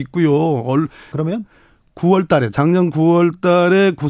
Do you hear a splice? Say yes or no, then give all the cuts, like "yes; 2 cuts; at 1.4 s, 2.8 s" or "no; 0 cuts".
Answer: yes; 1 cut; at 1.1 s